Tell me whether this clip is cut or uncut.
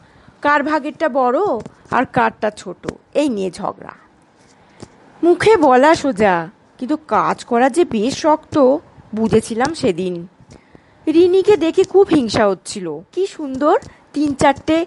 cut